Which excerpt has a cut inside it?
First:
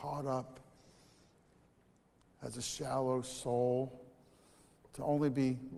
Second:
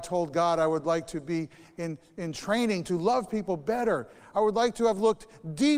second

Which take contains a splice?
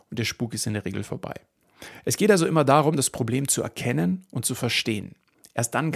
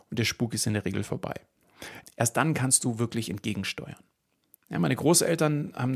second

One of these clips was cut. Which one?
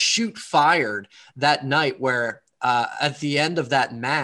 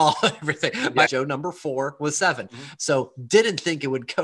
second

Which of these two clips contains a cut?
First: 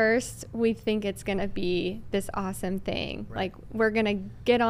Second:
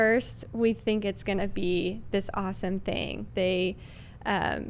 second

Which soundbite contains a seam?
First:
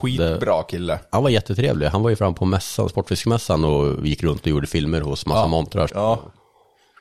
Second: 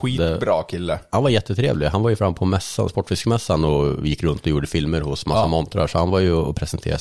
first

